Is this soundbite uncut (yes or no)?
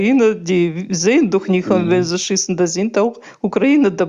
yes